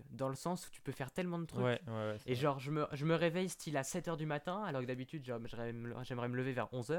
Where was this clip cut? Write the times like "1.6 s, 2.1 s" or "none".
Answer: none